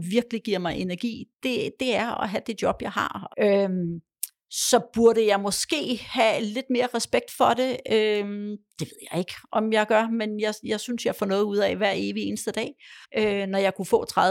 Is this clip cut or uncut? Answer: cut